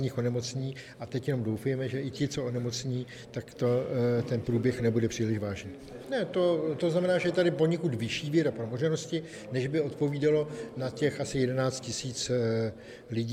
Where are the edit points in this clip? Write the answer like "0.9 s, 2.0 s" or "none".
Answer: 6.0 s

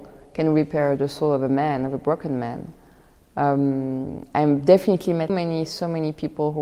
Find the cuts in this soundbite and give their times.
5.3 s

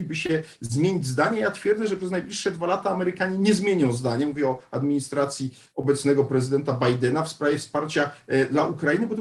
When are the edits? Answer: none

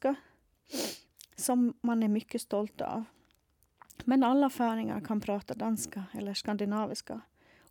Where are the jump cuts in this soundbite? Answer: none

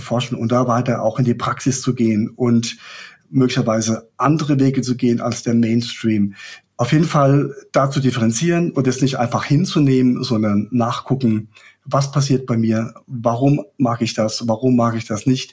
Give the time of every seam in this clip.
6.7 s

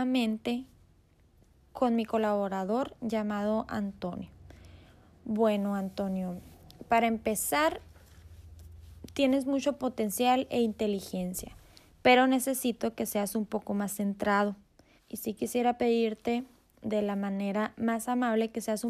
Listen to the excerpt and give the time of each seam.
15.0 s

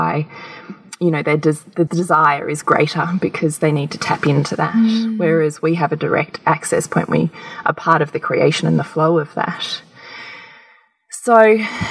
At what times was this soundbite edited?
1.9 s

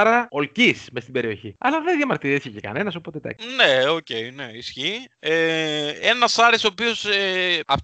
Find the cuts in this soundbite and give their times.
none

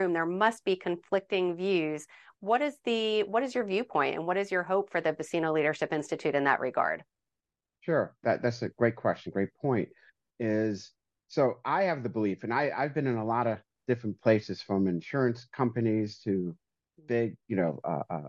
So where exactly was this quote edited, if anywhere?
none

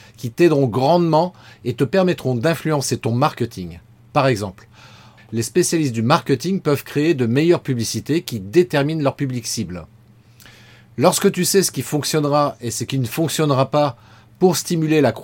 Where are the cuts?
5.2 s

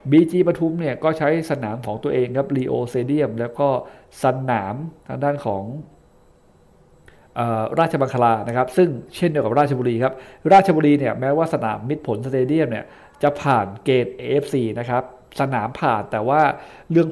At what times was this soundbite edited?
5.0 s

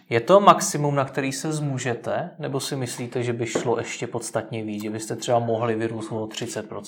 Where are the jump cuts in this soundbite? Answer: none

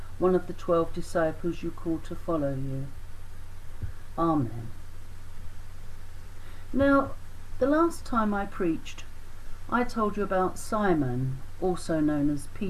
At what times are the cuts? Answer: 4.1 s

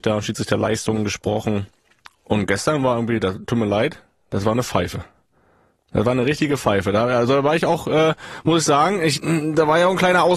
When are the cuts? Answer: 3.4 s

